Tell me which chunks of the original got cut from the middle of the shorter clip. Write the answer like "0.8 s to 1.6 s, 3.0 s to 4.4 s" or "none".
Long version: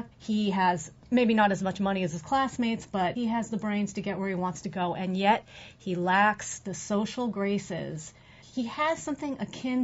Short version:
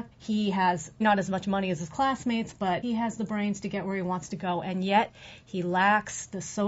1.0 s to 1.3 s

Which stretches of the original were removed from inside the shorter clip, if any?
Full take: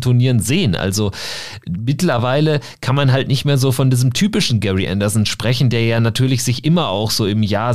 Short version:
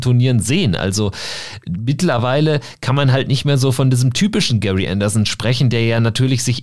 none

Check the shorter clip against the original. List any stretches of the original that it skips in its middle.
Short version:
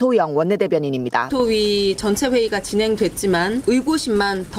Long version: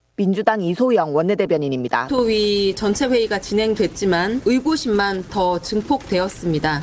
none

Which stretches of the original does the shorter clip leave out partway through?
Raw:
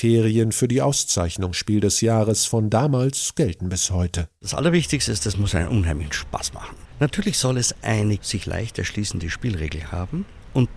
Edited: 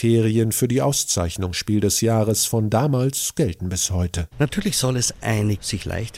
4.3 s to 6.9 s

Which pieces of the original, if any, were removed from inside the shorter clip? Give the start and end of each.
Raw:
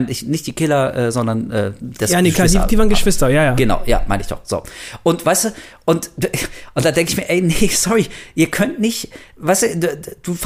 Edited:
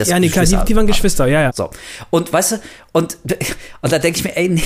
3.5 s to 4.4 s

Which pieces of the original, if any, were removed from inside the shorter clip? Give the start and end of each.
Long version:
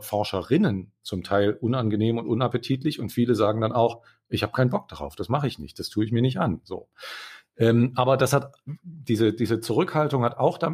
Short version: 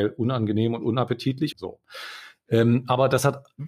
3.0 s to 6.6 s

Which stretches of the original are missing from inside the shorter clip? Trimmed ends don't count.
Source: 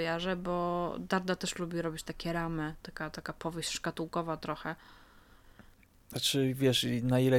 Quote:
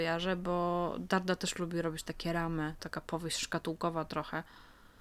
2.8 s to 3.1 s

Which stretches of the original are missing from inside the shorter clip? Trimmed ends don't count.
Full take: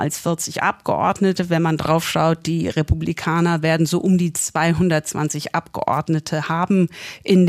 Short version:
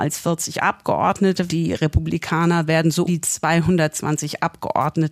1.5 s to 2.4 s, 4.0 s to 4.2 s

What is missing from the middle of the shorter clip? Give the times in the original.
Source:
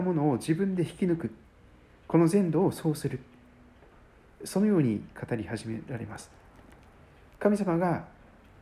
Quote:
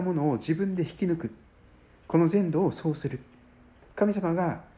3.9 s to 7.3 s

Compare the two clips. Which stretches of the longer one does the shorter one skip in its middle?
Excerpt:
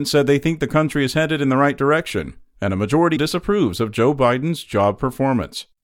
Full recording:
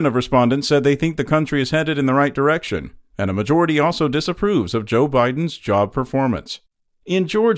3.7 s to 4.1 s

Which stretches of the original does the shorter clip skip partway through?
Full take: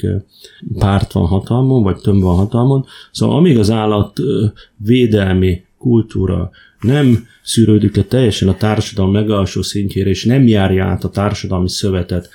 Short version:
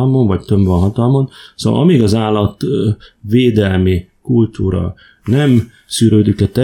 none

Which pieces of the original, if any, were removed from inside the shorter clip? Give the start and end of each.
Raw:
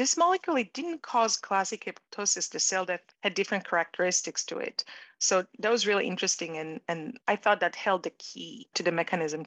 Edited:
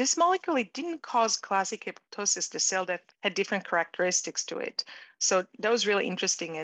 none

